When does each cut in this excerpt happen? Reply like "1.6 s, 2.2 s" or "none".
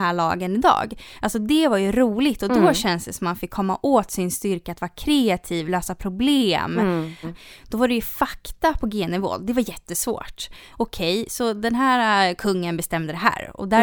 7.2 s, 10.7 s